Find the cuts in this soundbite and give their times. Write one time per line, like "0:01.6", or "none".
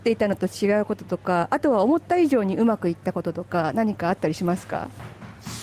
none